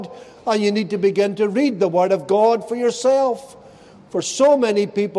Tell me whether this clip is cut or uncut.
uncut